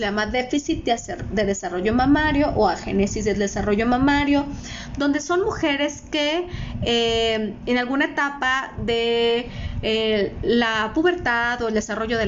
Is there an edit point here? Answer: no; 0 cuts

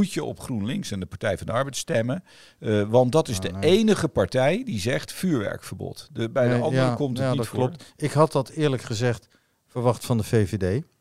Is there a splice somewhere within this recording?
no; 0 cuts

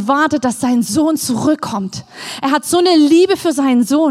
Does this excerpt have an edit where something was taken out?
no; 0 cuts

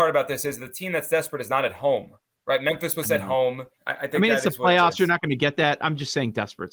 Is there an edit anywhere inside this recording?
yes; 1 cut; at 3.8 s

